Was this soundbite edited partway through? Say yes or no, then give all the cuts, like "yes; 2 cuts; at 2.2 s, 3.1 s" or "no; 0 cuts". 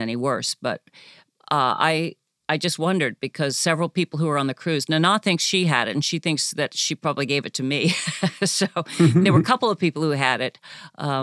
no; 0 cuts